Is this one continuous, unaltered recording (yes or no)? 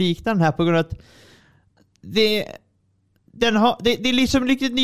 yes